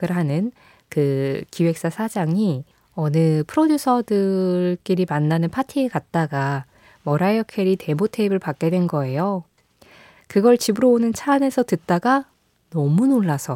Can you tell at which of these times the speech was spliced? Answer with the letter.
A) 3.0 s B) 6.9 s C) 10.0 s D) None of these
D